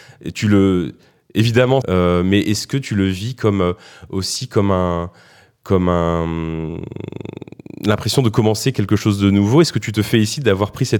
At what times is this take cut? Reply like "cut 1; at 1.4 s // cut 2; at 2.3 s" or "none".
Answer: cut 1; at 1.8 s